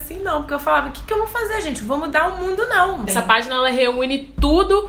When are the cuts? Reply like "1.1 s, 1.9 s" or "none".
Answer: 3.1 s